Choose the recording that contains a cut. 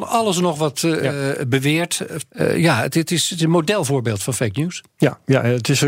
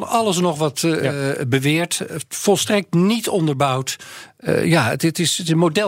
first; 1 cut; at 2.3 s

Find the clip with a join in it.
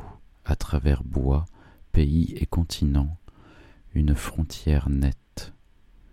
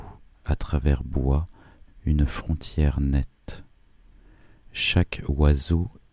second; 1 cut; at 1.9 s

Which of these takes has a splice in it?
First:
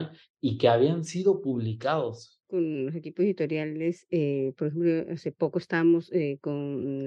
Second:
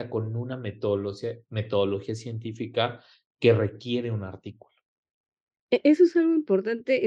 first; 1 cut; at 2.4 s

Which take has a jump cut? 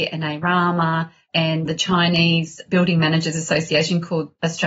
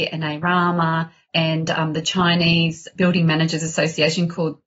first; 1 cut; at 1.7 s

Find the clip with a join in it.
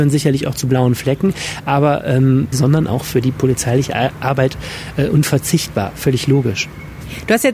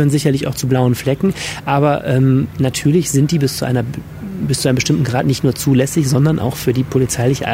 first; 1 cut; at 2.5 s

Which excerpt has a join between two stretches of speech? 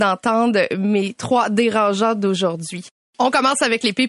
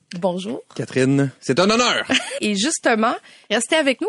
second; 1 cut; at 2.4 s

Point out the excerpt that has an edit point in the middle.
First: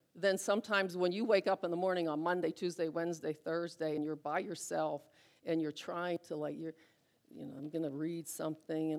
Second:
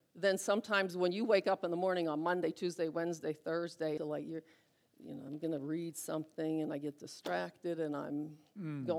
second; 1 cut; at 4.0 s

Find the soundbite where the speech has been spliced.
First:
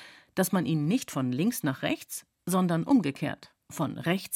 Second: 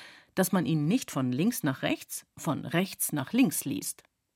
second; 1 cut; at 2.3 s

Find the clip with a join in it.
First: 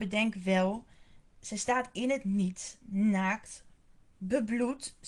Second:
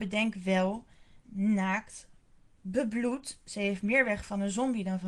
second; 1 cut; at 1.2 s

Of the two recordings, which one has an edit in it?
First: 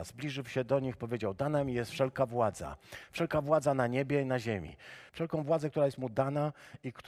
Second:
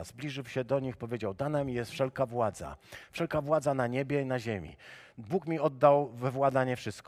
first; 1 cut; at 5.1 s

